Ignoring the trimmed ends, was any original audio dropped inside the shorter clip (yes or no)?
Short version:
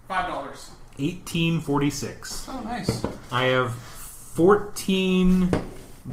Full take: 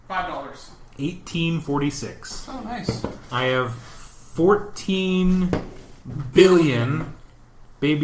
no